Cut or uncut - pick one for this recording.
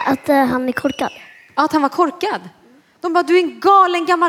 uncut